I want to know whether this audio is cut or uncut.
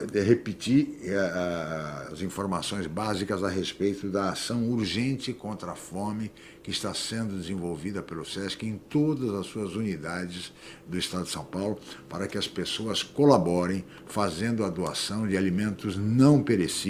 uncut